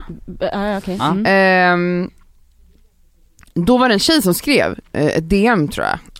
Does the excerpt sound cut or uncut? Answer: uncut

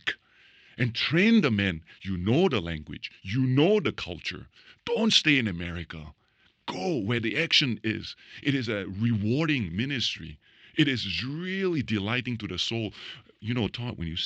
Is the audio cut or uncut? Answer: uncut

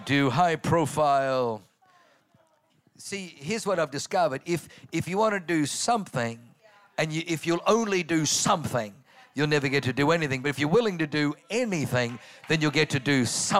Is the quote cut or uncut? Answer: uncut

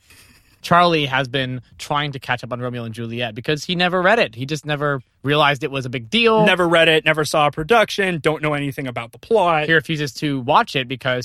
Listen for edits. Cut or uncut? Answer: uncut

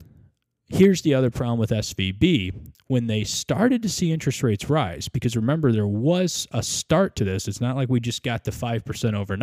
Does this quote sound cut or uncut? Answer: uncut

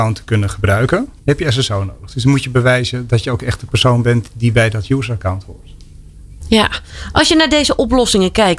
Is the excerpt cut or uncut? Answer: cut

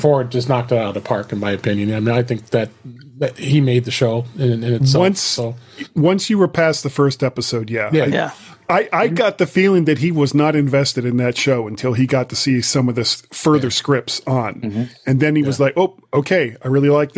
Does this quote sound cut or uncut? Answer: uncut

